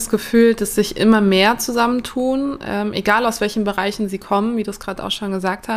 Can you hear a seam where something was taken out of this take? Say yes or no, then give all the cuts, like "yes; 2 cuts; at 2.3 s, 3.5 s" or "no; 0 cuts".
no; 0 cuts